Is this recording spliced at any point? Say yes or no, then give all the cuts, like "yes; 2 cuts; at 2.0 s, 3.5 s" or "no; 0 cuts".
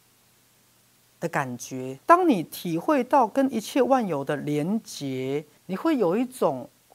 yes; 2 cuts; at 2.0 s, 5.6 s